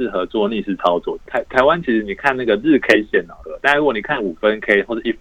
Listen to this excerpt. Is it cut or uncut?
cut